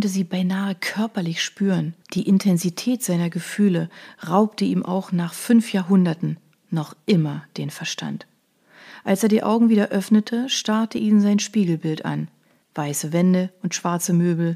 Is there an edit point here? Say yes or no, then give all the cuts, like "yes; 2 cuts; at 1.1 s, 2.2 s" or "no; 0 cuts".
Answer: yes; 2 cuts; at 2.0 s, 12.6 s